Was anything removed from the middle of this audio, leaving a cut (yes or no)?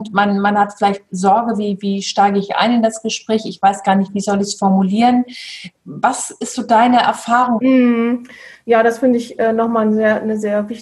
yes